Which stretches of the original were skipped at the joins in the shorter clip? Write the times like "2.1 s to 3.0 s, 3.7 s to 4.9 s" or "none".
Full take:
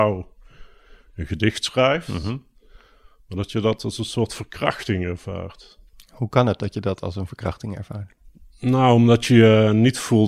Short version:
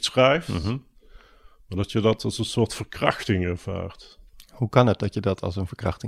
none